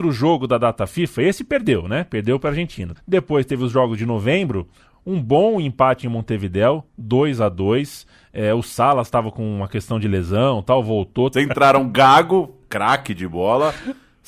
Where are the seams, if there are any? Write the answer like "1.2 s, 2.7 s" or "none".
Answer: 3.0 s, 11.3 s